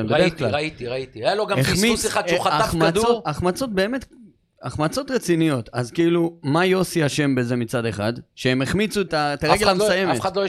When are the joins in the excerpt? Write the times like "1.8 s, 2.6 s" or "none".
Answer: 9.1 s